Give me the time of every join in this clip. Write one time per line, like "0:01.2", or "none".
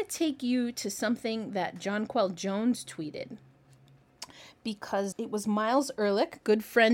0:05.1